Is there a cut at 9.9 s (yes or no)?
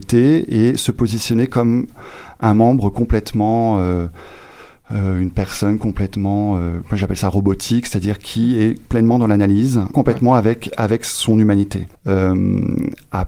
yes